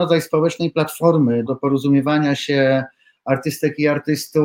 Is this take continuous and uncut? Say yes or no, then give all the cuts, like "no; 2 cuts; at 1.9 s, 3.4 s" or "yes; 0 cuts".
no; 1 cut; at 1.5 s